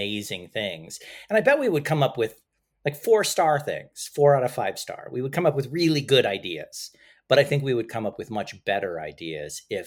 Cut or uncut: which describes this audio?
uncut